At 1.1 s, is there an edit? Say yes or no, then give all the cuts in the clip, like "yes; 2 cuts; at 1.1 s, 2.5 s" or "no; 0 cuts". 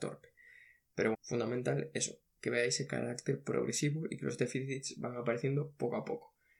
yes; 1 cut; at 1.1 s